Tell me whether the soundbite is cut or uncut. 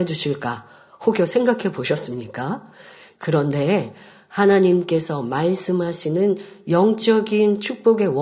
cut